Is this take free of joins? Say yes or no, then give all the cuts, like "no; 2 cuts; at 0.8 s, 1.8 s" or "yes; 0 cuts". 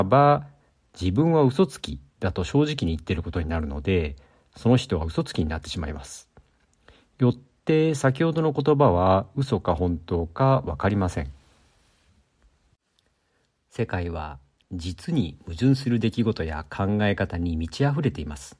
yes; 0 cuts